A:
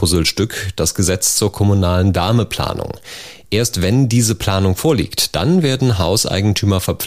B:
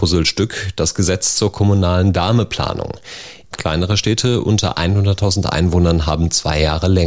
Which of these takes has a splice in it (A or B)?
B